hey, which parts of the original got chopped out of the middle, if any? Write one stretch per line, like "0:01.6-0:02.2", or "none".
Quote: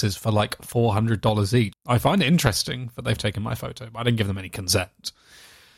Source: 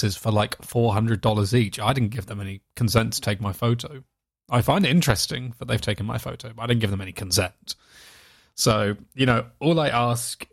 0:01.7-0:04.3

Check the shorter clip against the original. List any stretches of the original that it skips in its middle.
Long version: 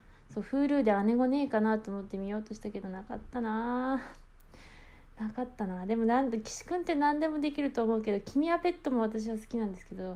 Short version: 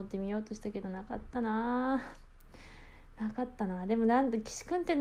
none

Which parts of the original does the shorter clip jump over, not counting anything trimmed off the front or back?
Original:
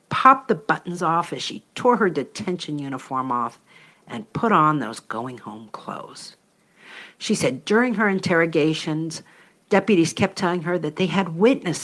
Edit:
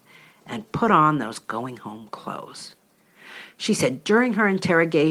none

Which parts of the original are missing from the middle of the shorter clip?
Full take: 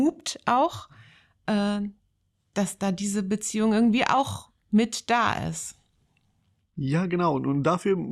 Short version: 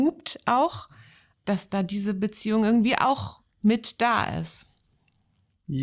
0:01.3-0:02.4

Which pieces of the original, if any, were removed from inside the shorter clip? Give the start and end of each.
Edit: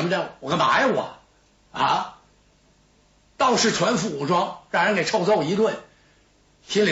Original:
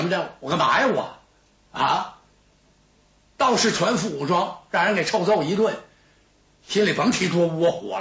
none

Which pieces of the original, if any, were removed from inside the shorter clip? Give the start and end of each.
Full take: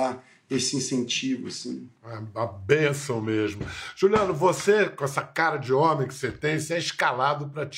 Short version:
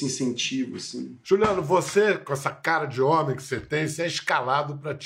0:01.9-0:03.9

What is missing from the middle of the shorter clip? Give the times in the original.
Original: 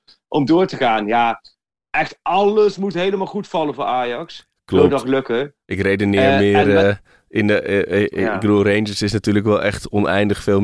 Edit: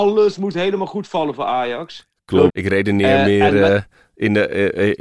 0:04.9-0:05.6

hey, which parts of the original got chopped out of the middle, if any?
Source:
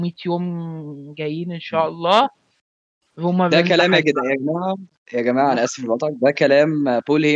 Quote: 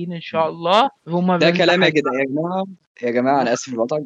0:02.4-0:03.1

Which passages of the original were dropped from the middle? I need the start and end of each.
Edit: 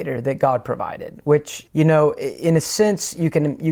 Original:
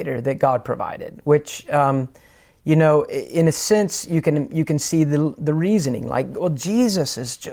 0:01.6-0:02.6

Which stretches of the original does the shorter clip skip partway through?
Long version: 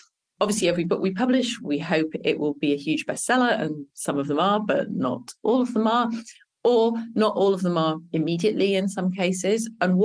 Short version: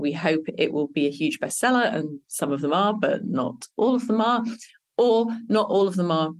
none

